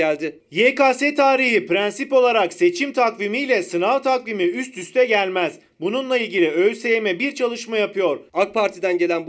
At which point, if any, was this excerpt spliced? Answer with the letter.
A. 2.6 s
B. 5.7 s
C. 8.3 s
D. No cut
C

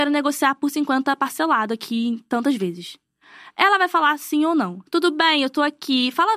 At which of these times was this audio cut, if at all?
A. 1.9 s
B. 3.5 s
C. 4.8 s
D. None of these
C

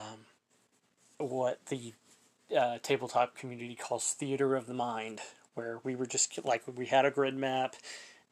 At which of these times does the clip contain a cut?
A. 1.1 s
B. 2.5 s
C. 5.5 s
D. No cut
A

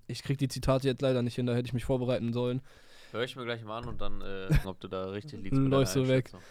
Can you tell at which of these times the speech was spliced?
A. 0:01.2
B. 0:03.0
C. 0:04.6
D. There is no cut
C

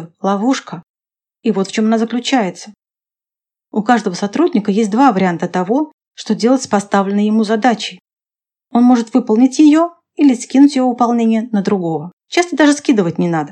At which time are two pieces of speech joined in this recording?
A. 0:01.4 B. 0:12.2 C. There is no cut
B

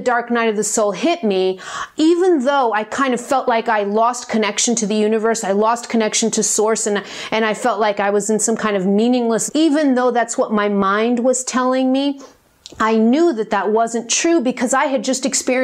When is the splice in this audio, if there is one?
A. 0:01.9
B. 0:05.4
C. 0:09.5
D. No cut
C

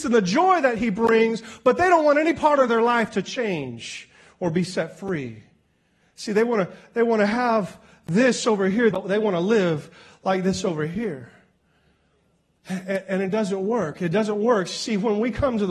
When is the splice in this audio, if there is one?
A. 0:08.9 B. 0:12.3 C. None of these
A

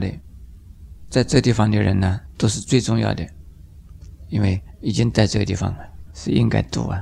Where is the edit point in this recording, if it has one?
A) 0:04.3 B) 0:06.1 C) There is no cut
B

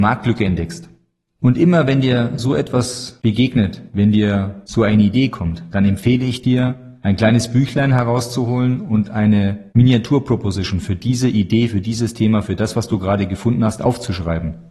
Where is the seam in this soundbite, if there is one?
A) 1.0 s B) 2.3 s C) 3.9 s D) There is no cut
D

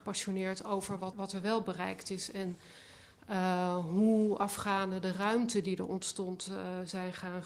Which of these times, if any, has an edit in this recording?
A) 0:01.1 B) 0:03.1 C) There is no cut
A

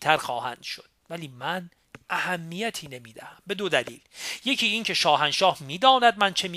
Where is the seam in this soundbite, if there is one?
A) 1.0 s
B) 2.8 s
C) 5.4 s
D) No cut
A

